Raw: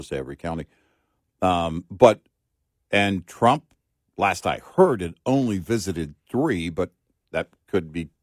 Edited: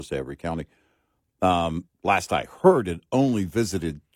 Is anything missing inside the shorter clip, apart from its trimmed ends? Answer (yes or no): yes